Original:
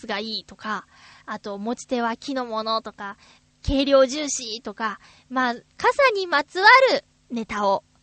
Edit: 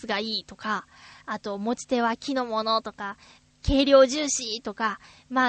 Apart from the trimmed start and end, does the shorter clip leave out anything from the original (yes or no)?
no